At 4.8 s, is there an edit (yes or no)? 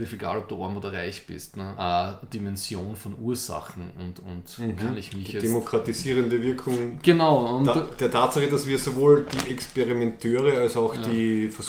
no